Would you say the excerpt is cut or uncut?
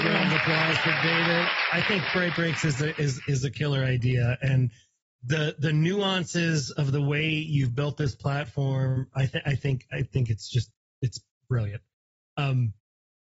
uncut